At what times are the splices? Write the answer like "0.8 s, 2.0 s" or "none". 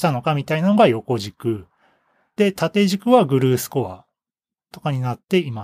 none

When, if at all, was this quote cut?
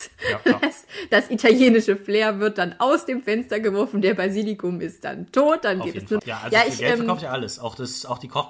6.2 s

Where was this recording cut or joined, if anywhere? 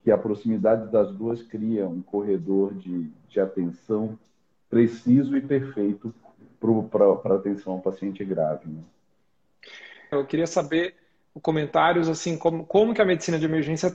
10.1 s

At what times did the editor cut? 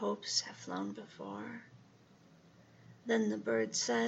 none

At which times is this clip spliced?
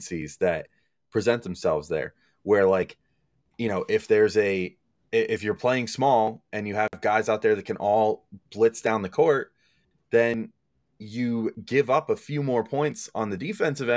none

